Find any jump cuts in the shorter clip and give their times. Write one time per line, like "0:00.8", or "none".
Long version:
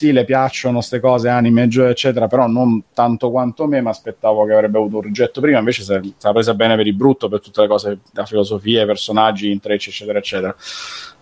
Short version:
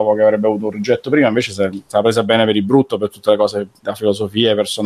none